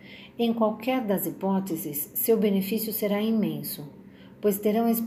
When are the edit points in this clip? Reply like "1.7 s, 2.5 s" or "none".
none